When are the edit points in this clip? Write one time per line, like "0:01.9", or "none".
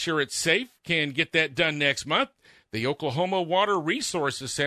none

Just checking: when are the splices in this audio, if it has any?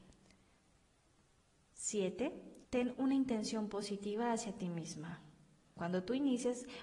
0:02.7
0:05.8

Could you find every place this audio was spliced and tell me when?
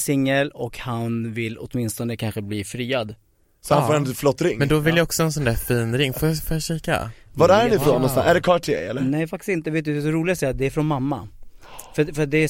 none

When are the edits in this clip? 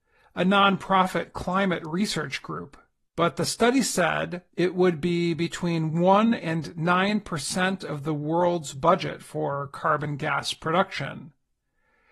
0:03.1
0:04.5

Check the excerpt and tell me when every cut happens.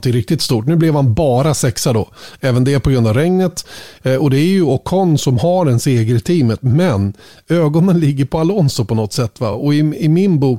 none

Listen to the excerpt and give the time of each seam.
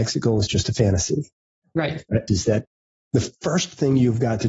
0:02.3

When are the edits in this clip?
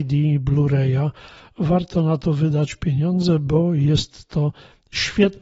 none

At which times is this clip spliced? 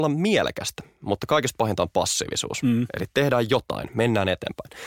none

